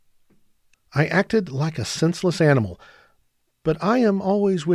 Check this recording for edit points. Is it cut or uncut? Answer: uncut